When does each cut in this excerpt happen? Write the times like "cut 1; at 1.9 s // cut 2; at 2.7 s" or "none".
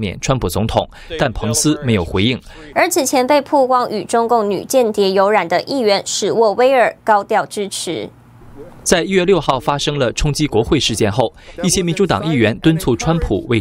cut 1; at 2.7 s